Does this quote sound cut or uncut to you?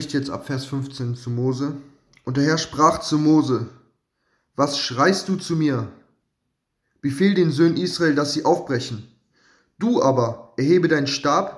uncut